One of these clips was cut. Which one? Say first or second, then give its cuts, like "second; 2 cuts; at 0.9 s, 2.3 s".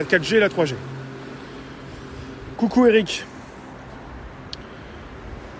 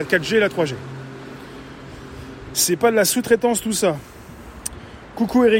first; 1 cut; at 2.5 s